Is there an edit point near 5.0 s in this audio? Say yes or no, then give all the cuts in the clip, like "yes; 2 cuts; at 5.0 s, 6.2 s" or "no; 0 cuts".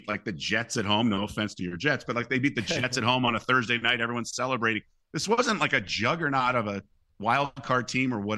no; 0 cuts